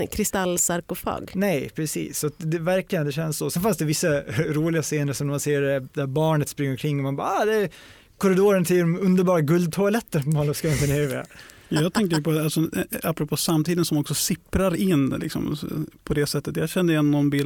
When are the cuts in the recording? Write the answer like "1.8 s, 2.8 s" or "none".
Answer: none